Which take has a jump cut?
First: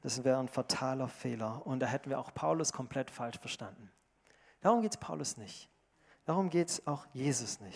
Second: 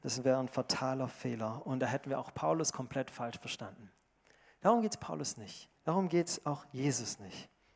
second; 1 cut; at 5.8 s

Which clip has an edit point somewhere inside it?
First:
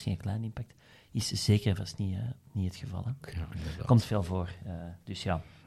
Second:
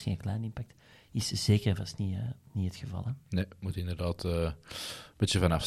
first; 1 cut; at 3.2 s

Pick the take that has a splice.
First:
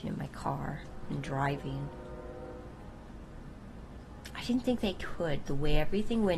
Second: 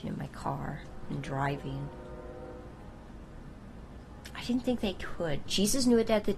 second; 1 cut; at 5.5 s

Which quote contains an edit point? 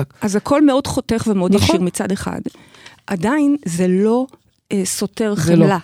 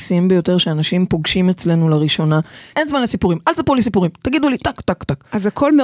second; 2 cuts; at 2.7 s, 4.8 s

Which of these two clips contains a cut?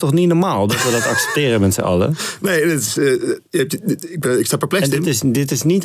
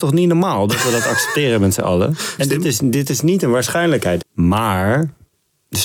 second; 2 cuts; at 2.4 s, 4.2 s

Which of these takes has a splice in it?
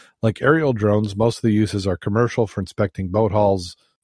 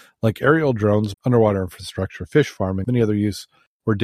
second; 2 cuts; at 1.1 s, 2.8 s

